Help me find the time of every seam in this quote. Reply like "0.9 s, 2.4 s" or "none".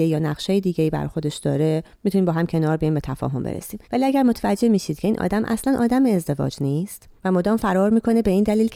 1.9 s, 3.8 s, 7.2 s